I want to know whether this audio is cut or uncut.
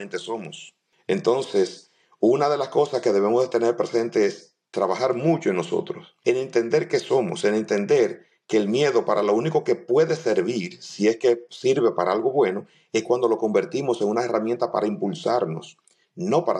uncut